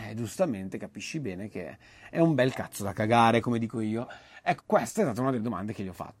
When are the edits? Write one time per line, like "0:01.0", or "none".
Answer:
0:04.6